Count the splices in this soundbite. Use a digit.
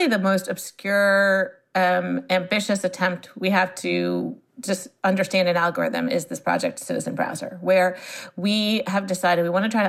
1